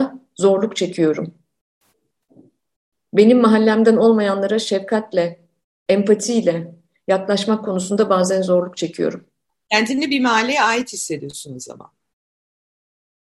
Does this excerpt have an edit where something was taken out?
no; 0 cuts

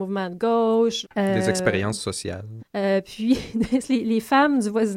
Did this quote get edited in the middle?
yes; 3 cuts; at 1.0 s, 2.6 s, 3.8 s

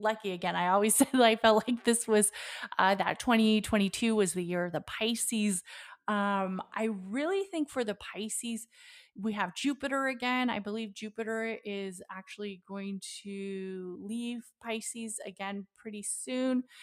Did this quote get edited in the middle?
no; 0 cuts

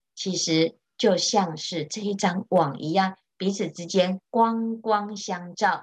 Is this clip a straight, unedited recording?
yes; 0 cuts

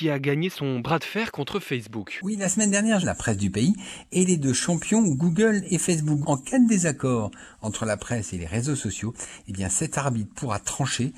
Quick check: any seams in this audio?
yes; 2 cuts; at 3.0 s, 6.2 s

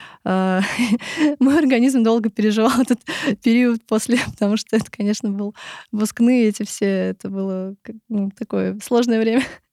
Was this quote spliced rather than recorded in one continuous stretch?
no; 0 cuts

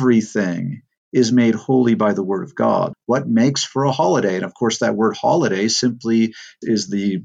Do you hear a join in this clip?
yes; 1 cut; at 2.9 s

